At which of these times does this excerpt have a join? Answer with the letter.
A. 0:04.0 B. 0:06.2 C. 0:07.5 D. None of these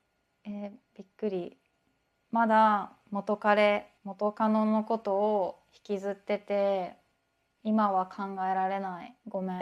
A